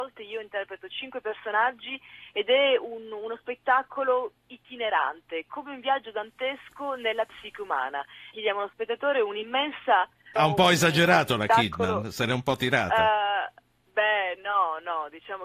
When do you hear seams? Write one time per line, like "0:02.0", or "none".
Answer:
0:08.3
0:10.4